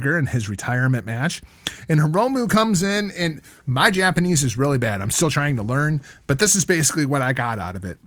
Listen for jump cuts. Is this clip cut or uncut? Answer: uncut